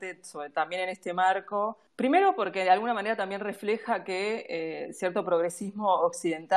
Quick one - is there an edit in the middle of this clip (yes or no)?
yes